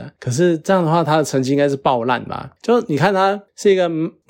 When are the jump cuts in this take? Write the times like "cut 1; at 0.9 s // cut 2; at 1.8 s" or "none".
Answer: cut 1; at 2.6 s